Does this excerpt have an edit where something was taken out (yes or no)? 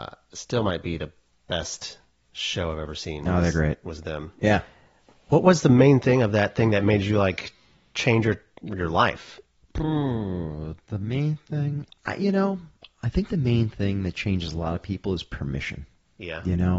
yes